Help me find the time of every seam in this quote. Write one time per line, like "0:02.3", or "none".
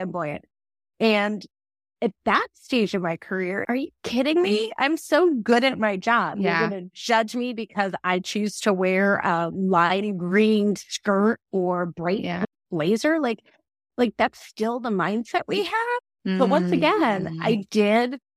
0:03.6